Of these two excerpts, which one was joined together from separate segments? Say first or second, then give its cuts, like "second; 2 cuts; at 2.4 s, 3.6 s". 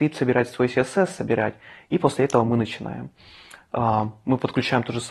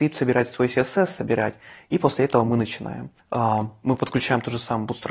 second; 1 cut; at 3.2 s